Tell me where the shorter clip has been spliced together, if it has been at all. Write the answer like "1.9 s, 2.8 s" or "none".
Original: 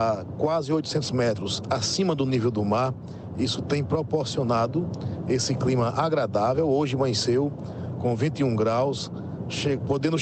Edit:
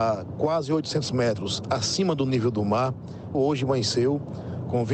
3.3 s